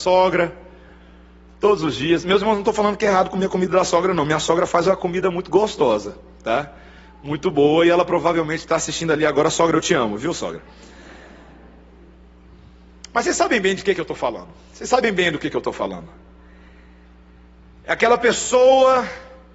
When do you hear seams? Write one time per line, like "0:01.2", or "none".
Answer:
none